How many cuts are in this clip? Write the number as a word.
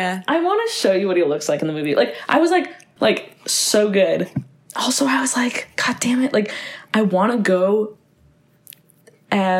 one